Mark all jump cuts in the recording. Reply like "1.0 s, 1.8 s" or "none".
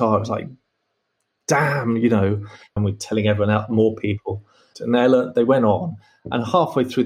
2.8 s, 4.7 s